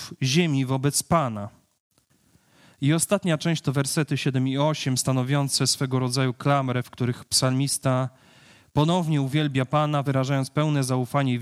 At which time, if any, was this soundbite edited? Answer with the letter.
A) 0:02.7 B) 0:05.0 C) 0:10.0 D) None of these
D